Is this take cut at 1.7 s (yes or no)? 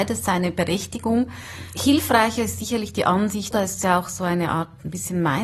no